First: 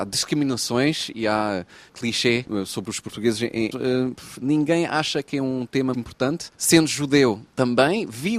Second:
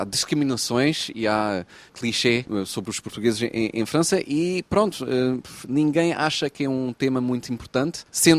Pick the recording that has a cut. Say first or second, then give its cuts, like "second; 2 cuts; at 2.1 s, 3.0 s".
first; 2 cuts; at 3.7 s, 5.9 s